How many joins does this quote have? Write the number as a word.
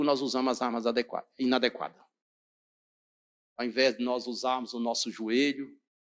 zero